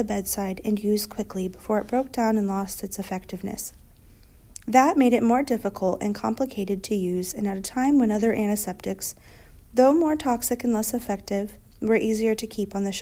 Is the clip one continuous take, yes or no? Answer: yes